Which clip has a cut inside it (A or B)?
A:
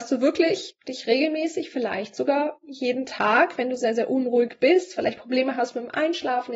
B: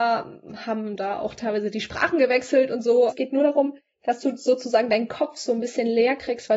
B